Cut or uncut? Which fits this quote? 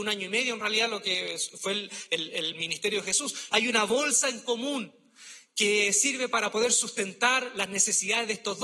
cut